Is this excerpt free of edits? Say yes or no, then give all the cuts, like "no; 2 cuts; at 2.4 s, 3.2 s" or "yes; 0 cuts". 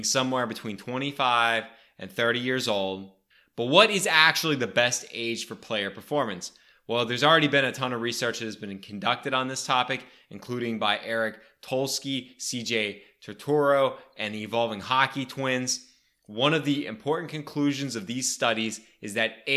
yes; 0 cuts